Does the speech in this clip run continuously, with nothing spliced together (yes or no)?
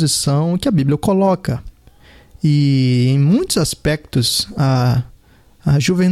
yes